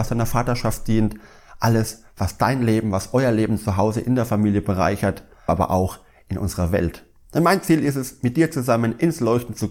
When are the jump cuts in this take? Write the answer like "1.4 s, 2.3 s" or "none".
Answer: 5.5 s